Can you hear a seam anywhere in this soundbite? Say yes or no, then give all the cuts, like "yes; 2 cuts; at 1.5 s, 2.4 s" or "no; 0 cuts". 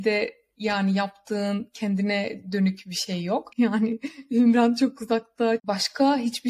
yes; 2 cuts; at 3.5 s, 5.6 s